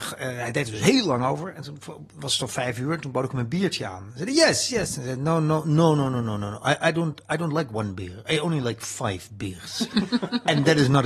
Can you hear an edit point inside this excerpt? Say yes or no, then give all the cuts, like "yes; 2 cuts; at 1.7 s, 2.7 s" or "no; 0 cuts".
no; 0 cuts